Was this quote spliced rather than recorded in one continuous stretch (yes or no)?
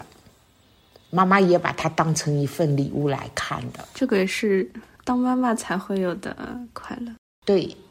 no